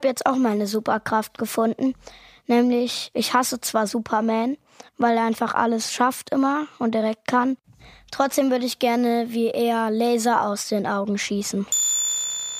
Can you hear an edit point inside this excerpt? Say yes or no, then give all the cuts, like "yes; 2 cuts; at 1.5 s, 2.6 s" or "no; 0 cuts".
yes; 1 cut; at 4.9 s